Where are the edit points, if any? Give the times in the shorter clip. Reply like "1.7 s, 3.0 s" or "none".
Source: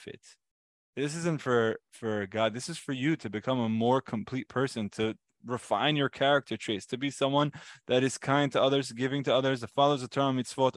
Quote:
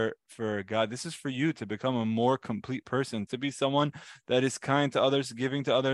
3.3 s